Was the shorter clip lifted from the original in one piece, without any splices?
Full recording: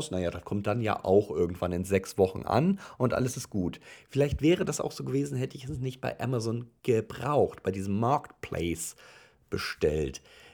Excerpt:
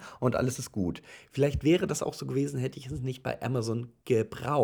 yes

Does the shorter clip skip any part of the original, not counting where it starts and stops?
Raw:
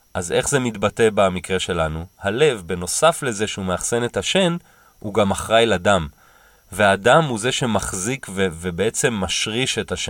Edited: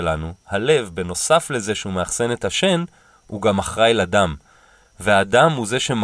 no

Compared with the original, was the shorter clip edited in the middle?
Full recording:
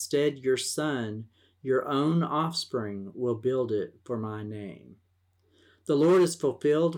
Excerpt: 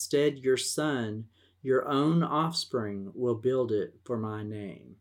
no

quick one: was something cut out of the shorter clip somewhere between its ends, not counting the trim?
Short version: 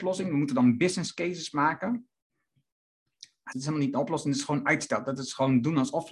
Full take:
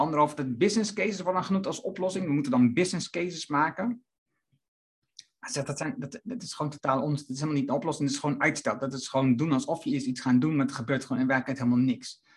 yes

